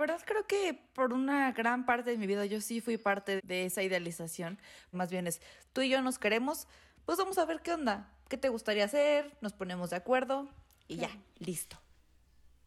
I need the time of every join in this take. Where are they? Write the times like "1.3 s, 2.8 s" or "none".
3.4 s, 4.9 s